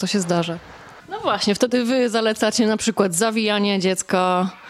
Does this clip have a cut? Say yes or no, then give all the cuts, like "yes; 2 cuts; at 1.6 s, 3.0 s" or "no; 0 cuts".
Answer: yes; 1 cut; at 1.0 s